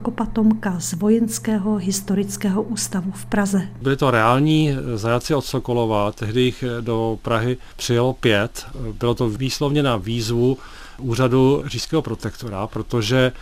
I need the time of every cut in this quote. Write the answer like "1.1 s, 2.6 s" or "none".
none